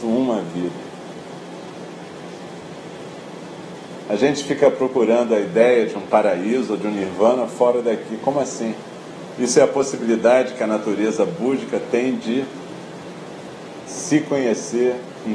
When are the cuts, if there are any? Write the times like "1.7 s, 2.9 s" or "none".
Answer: 9.4 s